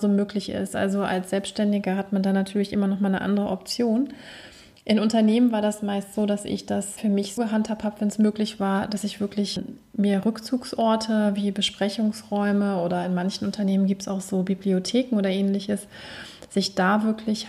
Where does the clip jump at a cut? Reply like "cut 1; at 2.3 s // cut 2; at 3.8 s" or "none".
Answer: cut 1; at 7.4 s